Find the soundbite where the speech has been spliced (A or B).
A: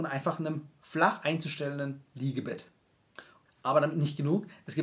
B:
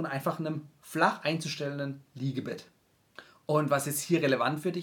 A